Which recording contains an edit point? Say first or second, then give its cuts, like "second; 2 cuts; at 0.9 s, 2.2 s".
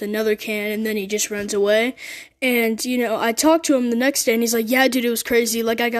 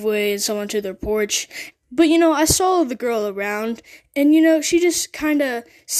second; 1 cut; at 1.7 s